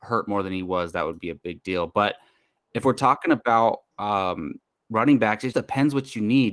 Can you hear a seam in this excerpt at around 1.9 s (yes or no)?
no